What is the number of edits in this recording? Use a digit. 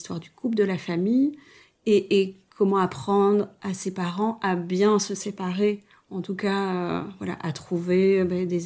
0